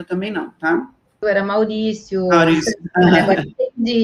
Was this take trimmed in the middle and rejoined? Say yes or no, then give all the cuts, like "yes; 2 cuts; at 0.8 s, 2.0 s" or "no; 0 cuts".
yes; 1 cut; at 1.2 s